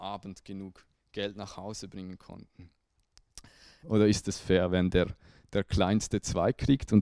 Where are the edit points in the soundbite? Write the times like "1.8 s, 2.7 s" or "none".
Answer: 3.8 s

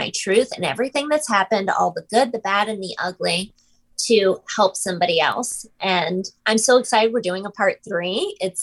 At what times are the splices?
none

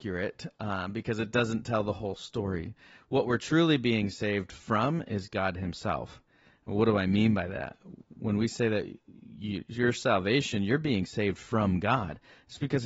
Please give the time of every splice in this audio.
none

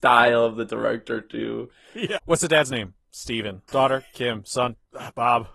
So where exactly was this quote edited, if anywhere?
2.2 s, 3.7 s

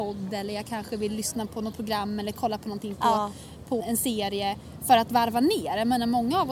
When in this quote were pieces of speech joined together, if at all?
3.8 s

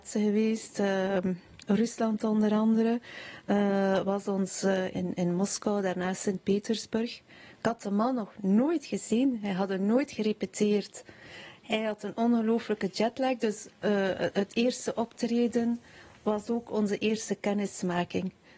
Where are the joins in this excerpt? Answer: 4.9 s

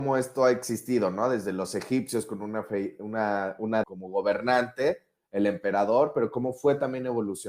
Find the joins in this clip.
3.8 s

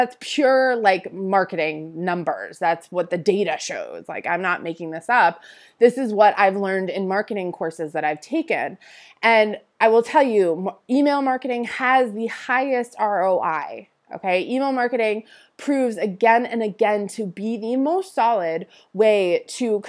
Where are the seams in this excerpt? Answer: none

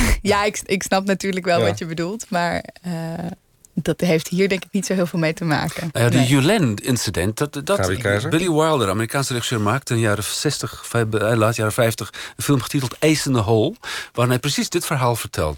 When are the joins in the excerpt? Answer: none

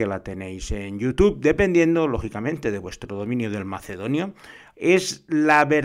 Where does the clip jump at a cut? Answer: 4.7 s

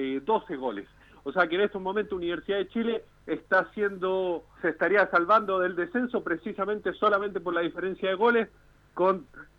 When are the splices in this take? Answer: 4.6 s

